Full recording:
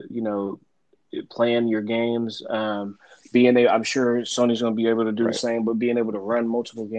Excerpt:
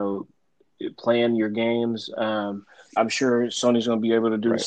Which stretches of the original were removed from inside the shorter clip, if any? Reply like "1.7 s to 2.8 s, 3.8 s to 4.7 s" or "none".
3.3 s to 3.7 s